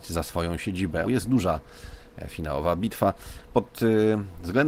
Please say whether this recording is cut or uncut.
cut